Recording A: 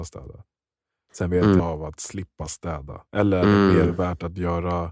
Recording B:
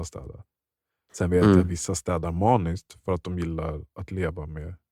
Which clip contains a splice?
A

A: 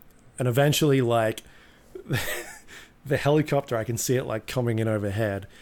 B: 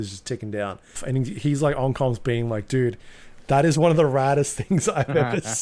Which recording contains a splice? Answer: B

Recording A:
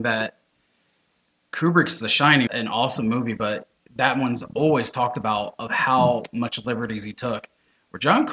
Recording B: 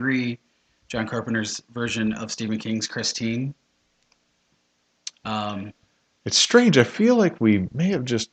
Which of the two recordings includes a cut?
A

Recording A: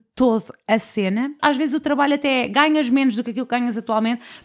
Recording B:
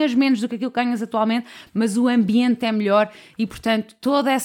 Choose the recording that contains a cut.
A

